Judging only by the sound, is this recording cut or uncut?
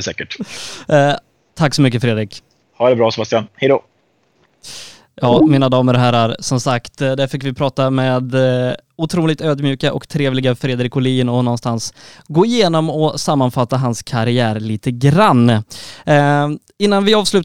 uncut